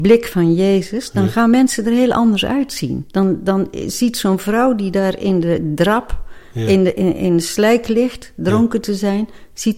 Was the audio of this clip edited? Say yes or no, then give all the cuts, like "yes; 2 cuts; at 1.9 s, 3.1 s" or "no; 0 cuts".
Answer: no; 0 cuts